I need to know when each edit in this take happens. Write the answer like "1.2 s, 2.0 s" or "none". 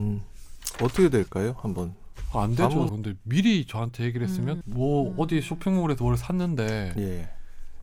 2.9 s, 4.6 s